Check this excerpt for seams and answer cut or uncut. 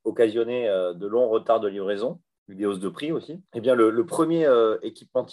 cut